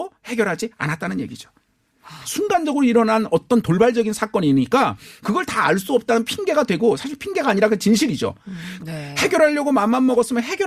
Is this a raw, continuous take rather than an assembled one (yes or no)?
no